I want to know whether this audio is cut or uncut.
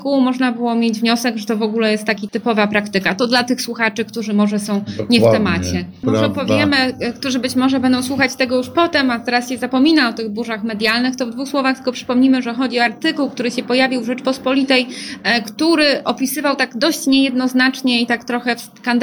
cut